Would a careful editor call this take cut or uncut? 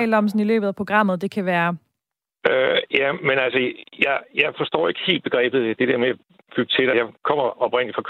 cut